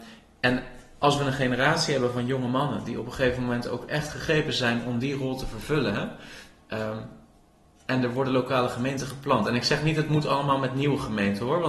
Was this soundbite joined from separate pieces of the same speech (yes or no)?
no